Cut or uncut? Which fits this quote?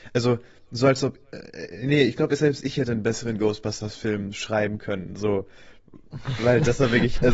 uncut